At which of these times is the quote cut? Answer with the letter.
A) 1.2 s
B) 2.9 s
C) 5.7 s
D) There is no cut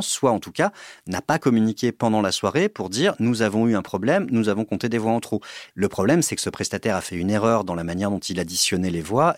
C